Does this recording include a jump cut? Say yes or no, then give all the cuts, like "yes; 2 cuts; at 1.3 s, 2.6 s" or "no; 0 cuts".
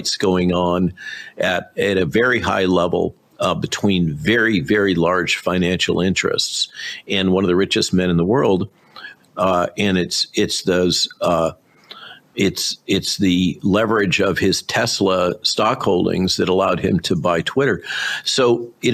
yes; 1 cut; at 9.2 s